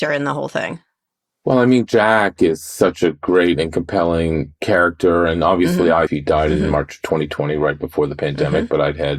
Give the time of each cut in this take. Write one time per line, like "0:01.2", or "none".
0:06.1